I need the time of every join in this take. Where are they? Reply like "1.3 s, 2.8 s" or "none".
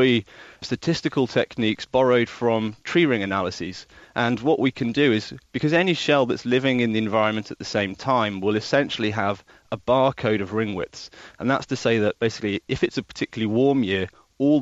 none